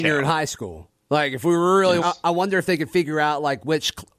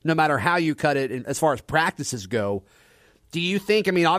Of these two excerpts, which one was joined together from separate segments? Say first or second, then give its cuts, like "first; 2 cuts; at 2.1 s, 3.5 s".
first; 1 cut; at 2.0 s